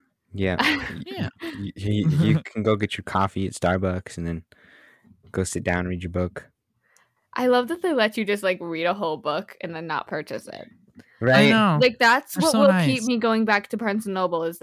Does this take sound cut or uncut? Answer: uncut